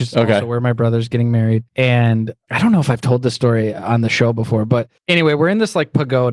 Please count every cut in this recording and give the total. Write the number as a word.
two